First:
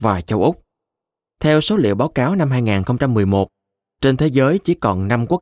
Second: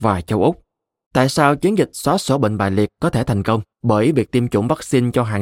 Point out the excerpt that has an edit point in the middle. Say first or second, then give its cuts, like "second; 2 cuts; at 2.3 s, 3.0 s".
second; 2 cuts; at 1.1 s, 3.7 s